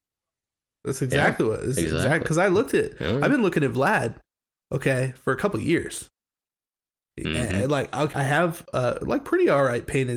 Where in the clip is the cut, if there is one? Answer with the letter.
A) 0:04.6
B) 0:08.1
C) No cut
B